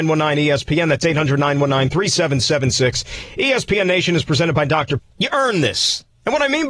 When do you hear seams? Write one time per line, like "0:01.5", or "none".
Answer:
0:05.0